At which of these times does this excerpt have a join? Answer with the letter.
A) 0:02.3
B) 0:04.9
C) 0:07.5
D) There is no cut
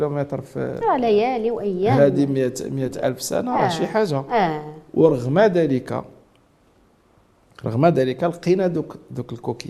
D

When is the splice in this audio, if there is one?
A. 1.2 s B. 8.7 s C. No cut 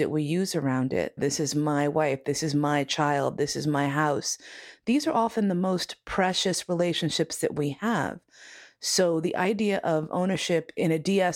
A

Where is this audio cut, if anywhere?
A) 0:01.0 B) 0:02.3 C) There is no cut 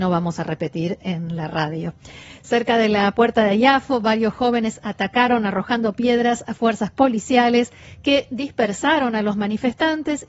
A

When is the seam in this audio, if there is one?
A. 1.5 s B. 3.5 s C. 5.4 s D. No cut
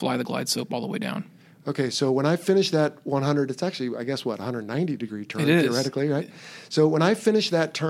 D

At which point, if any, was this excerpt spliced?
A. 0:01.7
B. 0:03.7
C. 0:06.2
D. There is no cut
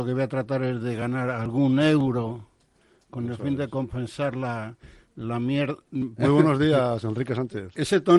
C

